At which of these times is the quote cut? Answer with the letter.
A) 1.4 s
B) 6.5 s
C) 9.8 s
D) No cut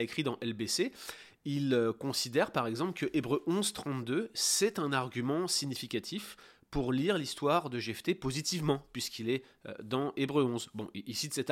C